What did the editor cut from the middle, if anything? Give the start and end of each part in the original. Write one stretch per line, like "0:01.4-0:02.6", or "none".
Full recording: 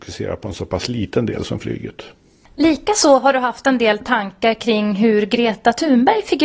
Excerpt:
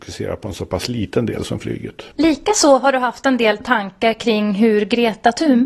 0:02.1-0:02.5